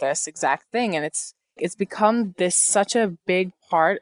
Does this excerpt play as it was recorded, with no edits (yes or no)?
no